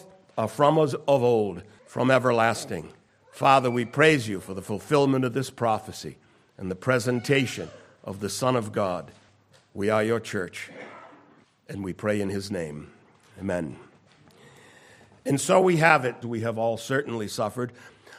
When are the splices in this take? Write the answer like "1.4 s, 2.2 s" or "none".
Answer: 16.2 s